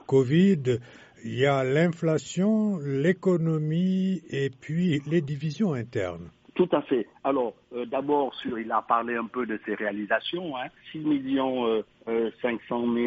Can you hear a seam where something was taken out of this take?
no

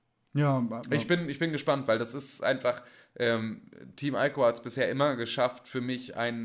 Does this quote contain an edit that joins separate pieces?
no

